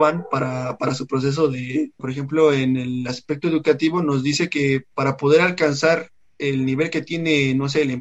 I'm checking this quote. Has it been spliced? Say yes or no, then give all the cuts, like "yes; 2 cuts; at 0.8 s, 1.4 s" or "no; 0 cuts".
yes; 1 cut; at 2.0 s